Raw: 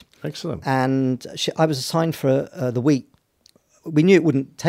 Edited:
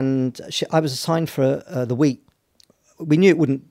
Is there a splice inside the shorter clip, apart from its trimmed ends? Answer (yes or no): no